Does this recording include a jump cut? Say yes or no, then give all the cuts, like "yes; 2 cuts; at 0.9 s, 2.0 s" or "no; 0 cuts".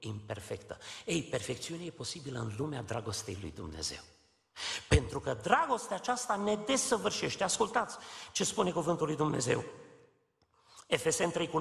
no; 0 cuts